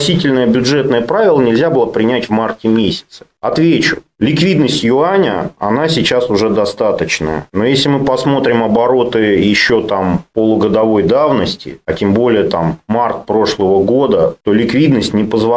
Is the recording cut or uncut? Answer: uncut